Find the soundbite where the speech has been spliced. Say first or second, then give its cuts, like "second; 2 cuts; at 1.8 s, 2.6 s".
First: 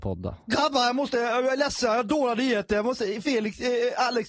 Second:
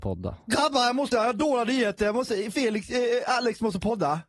second; 1 cut; at 1.1 s